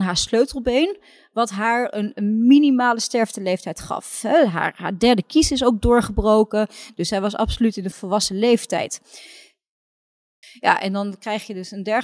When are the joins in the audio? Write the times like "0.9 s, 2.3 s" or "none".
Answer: 7.9 s, 10.4 s